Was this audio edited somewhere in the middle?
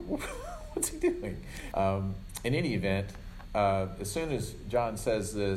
yes; 1 cut; at 1.7 s

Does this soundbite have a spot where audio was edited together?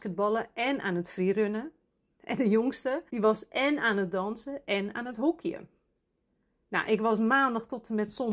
yes; 1 cut; at 3.1 s

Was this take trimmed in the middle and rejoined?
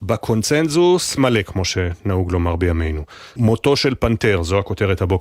yes; 2 cuts; at 1.2 s, 3.4 s

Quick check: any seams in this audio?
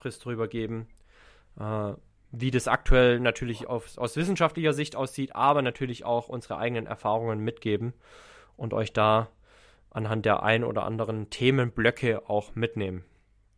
no; 0 cuts

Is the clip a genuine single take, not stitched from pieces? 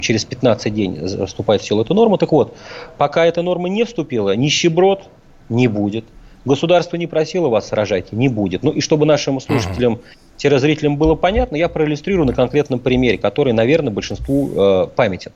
yes; 0 cuts

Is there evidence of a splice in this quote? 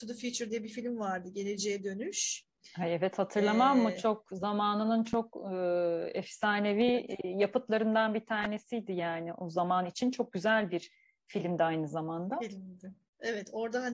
no; 0 cuts

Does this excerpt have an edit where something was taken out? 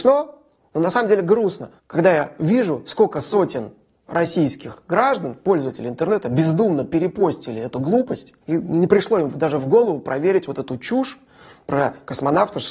yes; 2 cuts; at 1.8 s, 8.4 s

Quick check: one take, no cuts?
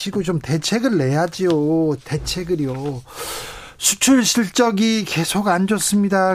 yes; 0 cuts

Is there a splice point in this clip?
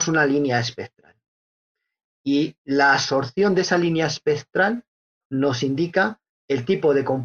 no; 0 cuts

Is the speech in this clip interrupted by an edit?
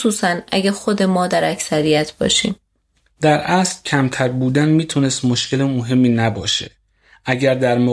no; 0 cuts

